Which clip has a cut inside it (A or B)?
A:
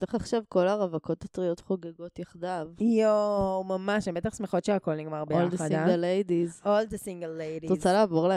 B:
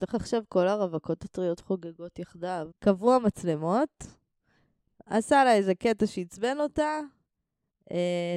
B